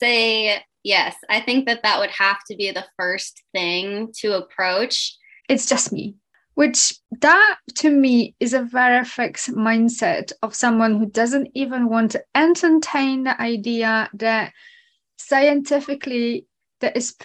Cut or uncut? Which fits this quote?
cut